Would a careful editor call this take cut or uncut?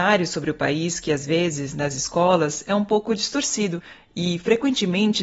uncut